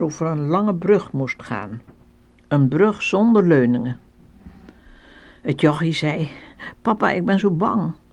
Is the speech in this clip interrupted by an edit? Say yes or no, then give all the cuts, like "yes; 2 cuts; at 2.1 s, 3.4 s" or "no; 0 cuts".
no; 0 cuts